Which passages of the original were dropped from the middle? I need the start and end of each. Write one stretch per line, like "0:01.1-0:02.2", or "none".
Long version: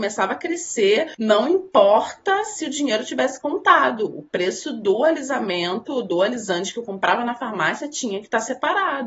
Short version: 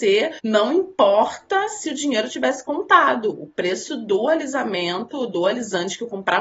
none